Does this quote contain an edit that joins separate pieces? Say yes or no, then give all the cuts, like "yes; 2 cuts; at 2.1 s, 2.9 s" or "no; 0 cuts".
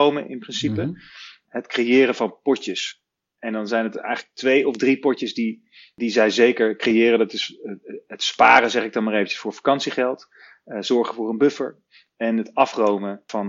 no; 0 cuts